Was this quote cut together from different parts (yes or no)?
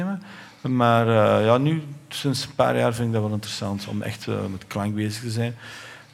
no